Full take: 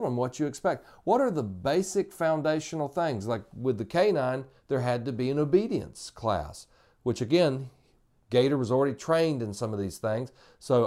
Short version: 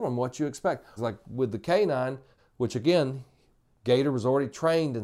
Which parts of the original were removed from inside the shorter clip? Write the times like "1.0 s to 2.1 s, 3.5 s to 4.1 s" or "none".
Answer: 1.0 s to 3.2 s, 4.6 s to 6.8 s